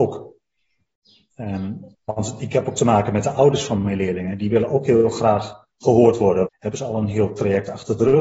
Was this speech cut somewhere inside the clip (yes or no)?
yes